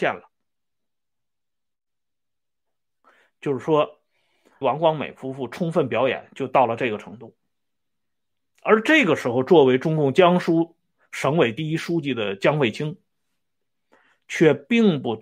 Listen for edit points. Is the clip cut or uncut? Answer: cut